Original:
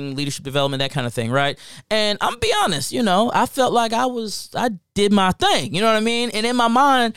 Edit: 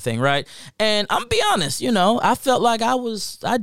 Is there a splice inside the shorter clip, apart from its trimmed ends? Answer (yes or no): no